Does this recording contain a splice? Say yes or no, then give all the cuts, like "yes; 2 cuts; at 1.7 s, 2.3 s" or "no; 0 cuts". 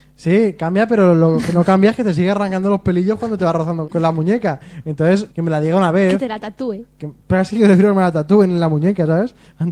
yes; 2 cuts; at 3.8 s, 5.3 s